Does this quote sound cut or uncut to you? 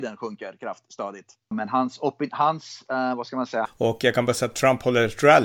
cut